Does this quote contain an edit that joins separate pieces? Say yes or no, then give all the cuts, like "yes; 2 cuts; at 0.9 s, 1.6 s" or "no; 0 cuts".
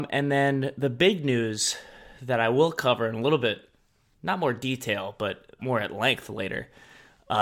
yes; 1 cut; at 5.6 s